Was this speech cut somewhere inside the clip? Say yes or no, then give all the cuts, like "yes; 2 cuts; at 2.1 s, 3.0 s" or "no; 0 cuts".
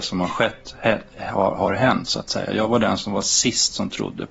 no; 0 cuts